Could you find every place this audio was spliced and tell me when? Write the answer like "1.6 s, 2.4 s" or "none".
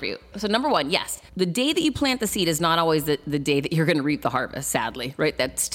1.3 s